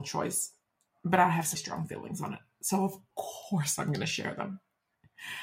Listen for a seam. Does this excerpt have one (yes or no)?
yes